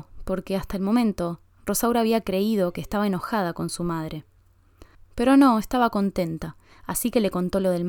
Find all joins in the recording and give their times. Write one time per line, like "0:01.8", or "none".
0:04.9